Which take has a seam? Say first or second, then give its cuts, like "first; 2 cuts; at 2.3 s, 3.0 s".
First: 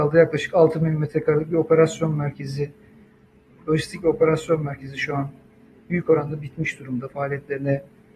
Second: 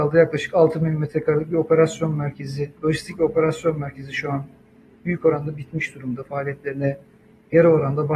second; 1 cut; at 2.8 s